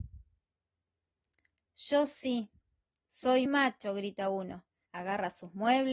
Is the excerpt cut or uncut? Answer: cut